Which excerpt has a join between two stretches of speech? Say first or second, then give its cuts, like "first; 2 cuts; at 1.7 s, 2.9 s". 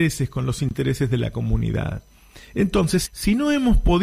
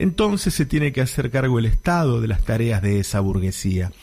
first; 1 cut; at 3.0 s